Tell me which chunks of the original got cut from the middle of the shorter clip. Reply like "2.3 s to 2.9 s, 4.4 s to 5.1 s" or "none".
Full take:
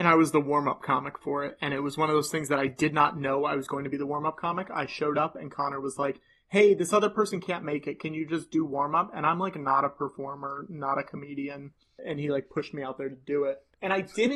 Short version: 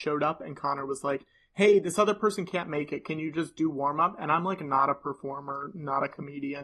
none